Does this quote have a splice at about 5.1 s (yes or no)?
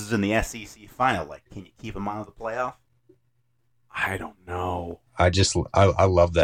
yes